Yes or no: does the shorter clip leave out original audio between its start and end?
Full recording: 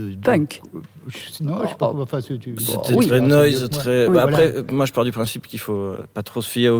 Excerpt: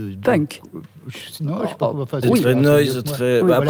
yes